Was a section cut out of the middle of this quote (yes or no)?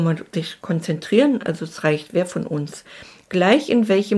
no